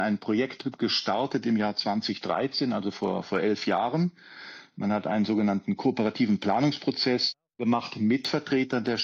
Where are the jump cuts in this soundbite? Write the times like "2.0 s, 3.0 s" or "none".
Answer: none